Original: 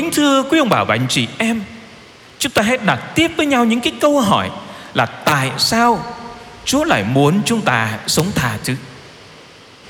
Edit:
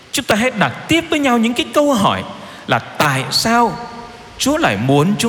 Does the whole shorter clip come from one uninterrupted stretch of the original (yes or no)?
yes